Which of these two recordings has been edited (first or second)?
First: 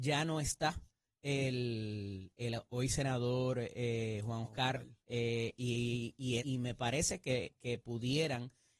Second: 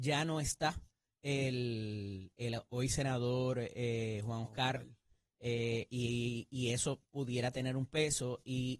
first